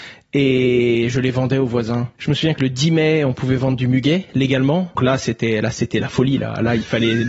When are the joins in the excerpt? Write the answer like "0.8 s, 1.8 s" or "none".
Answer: 2.1 s, 5.0 s

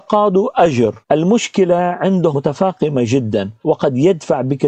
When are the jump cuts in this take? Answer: 1.0 s

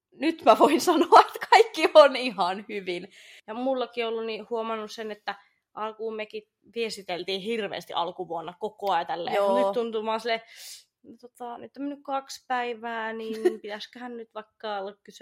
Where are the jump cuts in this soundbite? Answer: 3.4 s

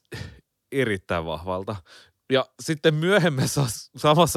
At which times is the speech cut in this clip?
2.1 s

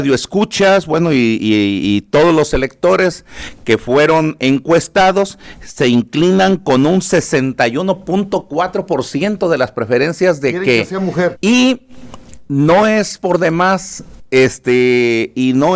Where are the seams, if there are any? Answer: 11.3 s

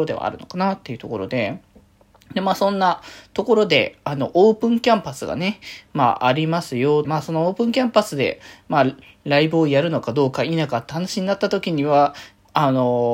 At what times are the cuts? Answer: 7.0 s

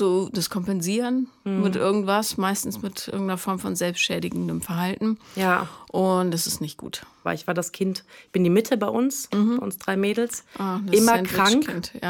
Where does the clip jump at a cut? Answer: 7.2 s

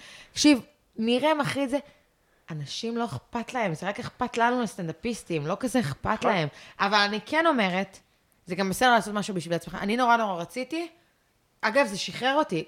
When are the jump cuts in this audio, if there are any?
none

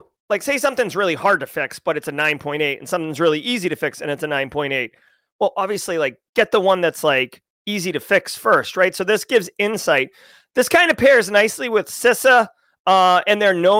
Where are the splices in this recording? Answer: none

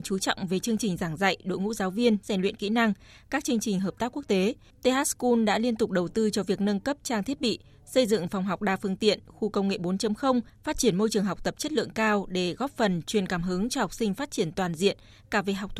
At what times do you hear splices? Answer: 2.2 s

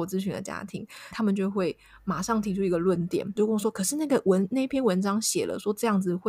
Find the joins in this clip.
1.1 s, 3.3 s

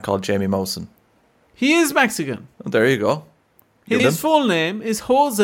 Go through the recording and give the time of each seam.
2.5 s, 4.0 s

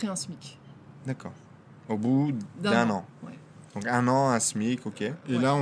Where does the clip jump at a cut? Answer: none

